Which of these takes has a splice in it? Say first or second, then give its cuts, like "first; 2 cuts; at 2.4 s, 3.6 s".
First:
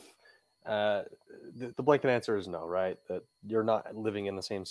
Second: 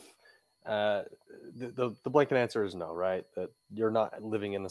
first; 1 cut; at 1.7 s